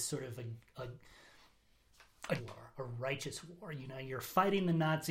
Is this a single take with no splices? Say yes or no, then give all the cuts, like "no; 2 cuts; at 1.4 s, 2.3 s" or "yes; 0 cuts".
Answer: no; 1 cut; at 2.4 s